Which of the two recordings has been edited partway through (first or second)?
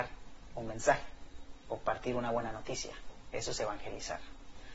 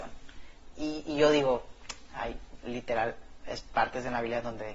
second